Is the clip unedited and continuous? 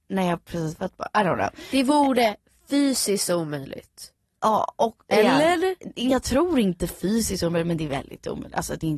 yes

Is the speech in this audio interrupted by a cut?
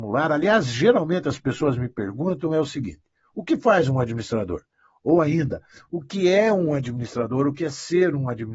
no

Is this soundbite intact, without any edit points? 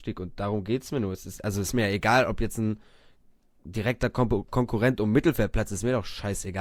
yes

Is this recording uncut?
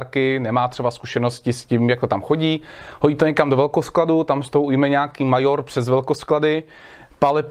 yes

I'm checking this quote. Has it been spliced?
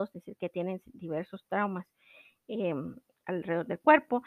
no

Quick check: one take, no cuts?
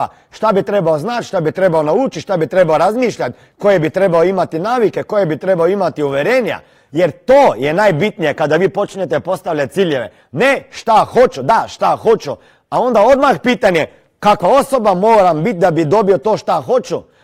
yes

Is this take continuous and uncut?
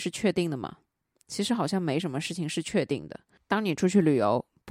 yes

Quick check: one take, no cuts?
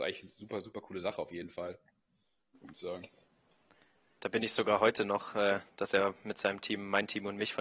no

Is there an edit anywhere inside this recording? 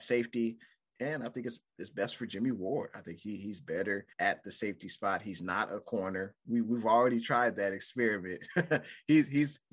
yes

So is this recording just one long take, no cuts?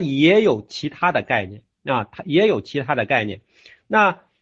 yes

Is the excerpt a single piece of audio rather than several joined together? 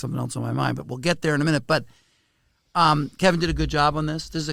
yes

